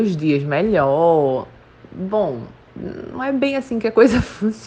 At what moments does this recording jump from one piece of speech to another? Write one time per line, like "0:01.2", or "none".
none